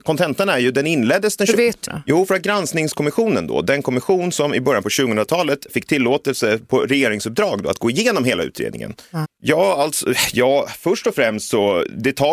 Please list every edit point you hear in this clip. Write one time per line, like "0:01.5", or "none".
0:01.9
0:09.2